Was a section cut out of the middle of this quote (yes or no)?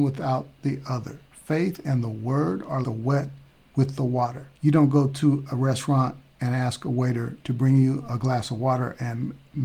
yes